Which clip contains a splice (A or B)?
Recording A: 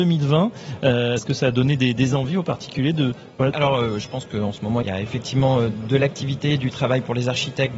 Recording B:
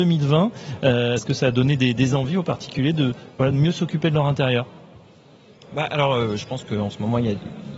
A